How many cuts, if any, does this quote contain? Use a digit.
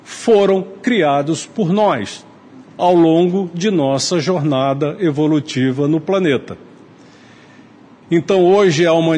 1